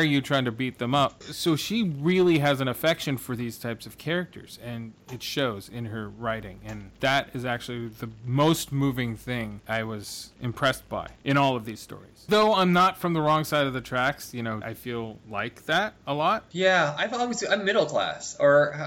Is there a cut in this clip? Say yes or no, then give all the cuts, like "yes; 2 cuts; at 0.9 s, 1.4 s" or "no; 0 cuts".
yes; 3 cuts; at 1.2 s, 12.3 s, 14.6 s